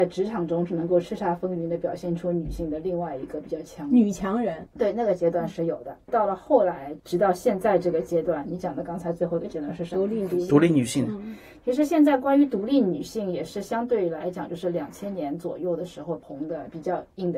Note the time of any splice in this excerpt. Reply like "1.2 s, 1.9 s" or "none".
none